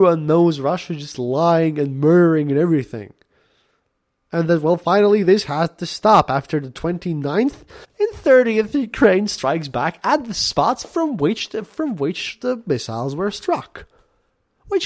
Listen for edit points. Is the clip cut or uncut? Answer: cut